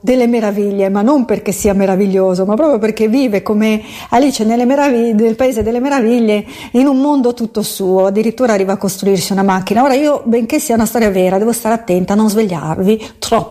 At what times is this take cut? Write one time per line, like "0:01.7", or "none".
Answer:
none

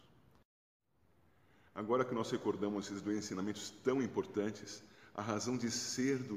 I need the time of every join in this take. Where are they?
none

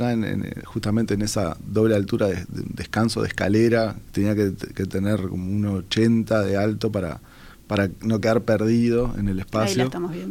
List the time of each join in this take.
0:04.0

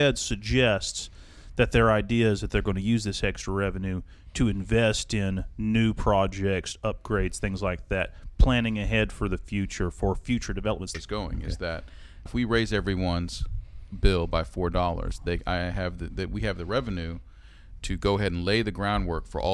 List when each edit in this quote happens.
0:10.9
0:12.3

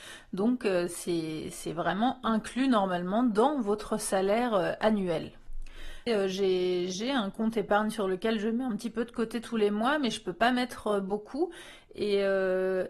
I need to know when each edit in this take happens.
0:06.1

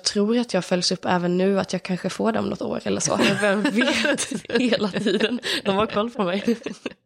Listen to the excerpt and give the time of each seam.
0:03.2

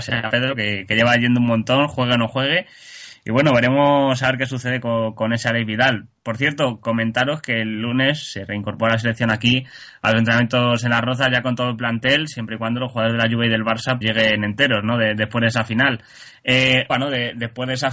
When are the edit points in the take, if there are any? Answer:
0:14.0
0:16.9

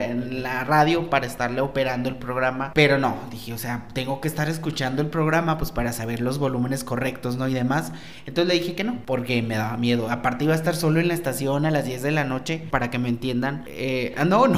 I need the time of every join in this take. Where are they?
0:12.7

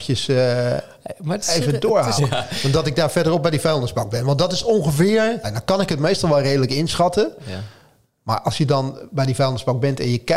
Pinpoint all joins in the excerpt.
0:02.2
0:05.4

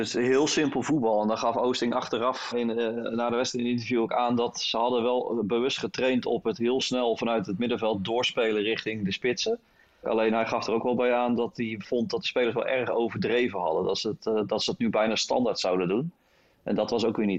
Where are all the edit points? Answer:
0:02.5
0:10.0

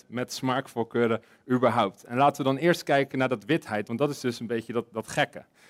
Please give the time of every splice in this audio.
none

